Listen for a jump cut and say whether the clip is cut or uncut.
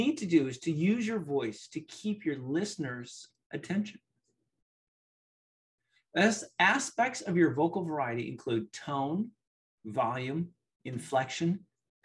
uncut